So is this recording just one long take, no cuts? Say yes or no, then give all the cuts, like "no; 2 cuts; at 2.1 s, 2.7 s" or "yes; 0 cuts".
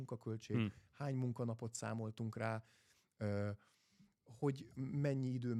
yes; 0 cuts